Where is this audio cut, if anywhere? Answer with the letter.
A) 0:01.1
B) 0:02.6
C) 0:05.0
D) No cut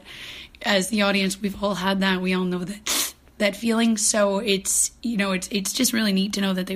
C